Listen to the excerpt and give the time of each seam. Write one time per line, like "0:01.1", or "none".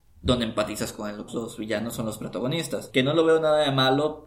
0:01.3
0:02.9